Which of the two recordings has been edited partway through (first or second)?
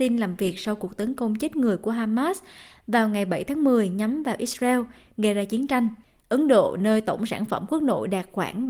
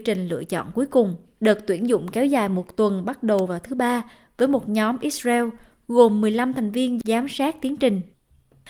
second